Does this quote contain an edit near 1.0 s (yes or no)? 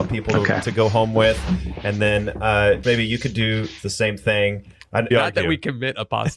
no